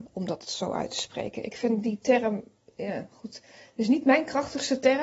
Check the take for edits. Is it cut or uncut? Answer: uncut